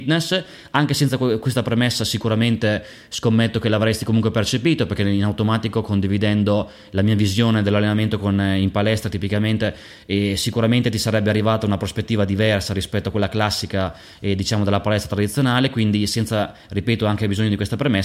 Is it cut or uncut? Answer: uncut